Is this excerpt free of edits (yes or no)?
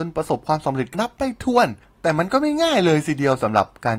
no